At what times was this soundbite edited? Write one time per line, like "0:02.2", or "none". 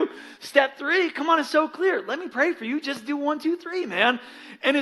none